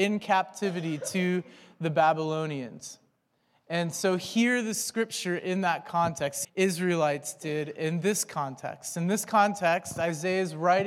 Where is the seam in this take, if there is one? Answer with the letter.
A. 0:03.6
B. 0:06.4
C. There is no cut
B